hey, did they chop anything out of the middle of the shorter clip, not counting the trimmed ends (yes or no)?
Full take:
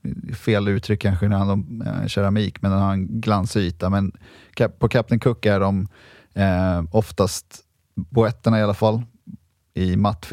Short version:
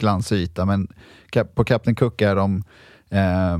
no